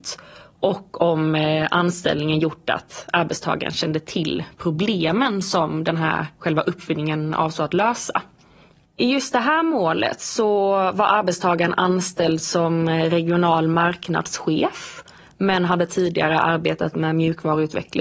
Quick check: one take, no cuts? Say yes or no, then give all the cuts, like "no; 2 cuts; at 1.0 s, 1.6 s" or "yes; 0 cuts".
yes; 0 cuts